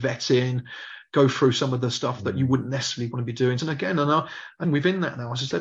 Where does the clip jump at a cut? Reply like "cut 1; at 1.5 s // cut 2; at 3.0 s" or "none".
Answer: cut 1; at 3.6 s // cut 2; at 4.6 s